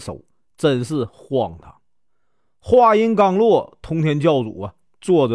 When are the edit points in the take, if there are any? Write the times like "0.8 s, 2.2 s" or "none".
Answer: none